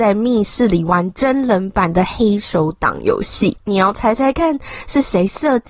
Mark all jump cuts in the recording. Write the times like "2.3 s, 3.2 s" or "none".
3.6 s

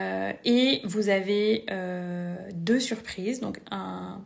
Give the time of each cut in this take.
none

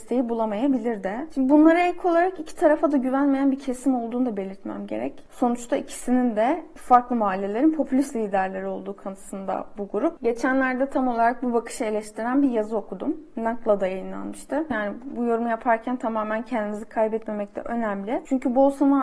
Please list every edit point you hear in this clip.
14.7 s

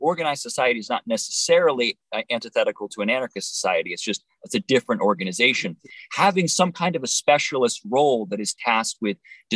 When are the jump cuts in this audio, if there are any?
none

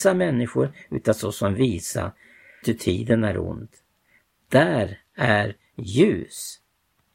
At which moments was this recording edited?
2.6 s, 4.3 s

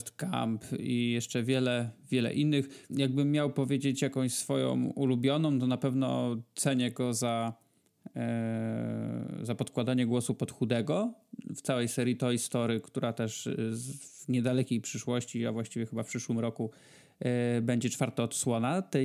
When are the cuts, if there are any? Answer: 2.9 s

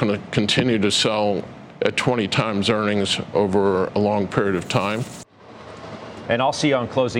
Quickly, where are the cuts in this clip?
6.2 s

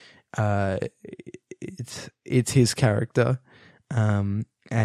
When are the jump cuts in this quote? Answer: none

